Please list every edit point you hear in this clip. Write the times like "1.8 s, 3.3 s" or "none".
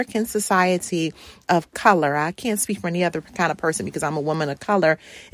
1.4 s